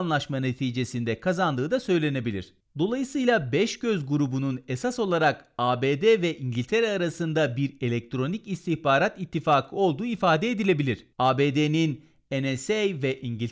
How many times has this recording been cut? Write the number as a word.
two